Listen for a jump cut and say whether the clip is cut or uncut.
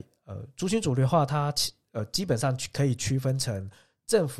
uncut